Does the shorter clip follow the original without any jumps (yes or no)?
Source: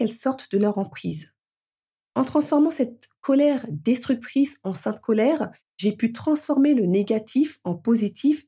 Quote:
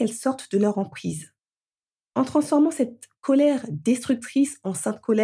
yes